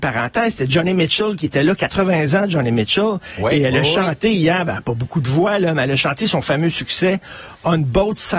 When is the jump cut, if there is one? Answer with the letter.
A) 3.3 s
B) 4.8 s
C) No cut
C